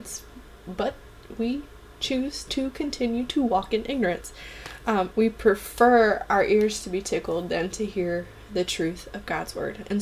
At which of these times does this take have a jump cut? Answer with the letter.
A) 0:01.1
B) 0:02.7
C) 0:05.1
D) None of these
C